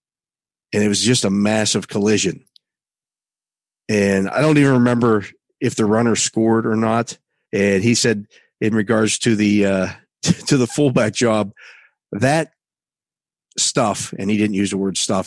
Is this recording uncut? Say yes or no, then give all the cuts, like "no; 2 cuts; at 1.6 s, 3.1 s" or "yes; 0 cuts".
no; 1 cut; at 7.4 s